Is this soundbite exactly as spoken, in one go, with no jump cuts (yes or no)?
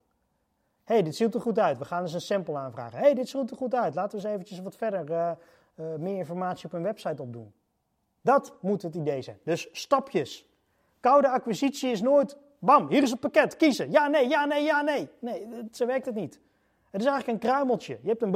yes